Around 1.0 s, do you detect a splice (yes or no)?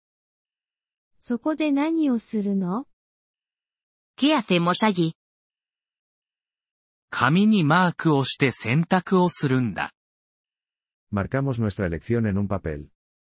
yes